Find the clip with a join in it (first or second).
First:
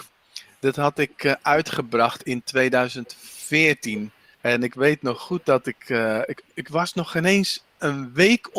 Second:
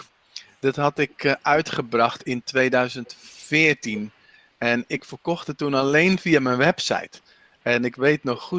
first